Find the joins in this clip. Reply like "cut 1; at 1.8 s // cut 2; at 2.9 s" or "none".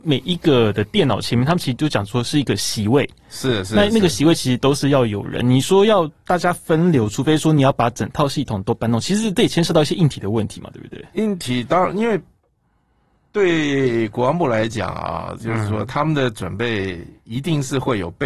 none